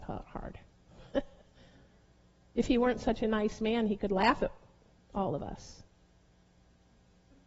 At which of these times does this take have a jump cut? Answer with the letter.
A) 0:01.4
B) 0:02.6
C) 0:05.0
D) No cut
D